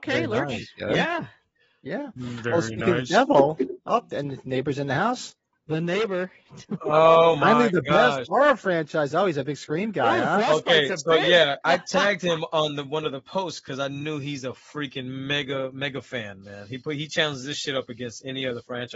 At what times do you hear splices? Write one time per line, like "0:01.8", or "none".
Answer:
0:11.6